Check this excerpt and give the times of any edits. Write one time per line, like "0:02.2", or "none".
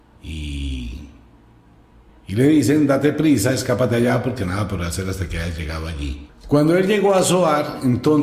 0:02.1
0:06.3